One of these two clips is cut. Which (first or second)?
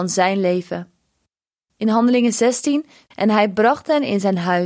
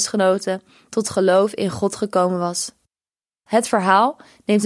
first